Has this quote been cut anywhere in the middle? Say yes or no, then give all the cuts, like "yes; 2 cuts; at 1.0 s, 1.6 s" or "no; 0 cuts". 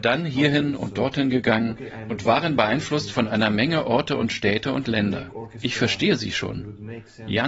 no; 0 cuts